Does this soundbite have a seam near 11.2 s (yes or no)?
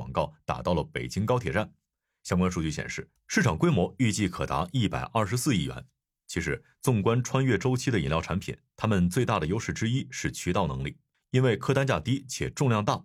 no